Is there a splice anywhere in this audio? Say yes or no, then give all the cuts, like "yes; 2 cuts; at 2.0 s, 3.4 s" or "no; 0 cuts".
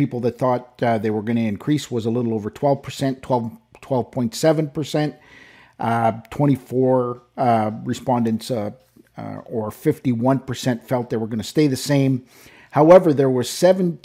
no; 0 cuts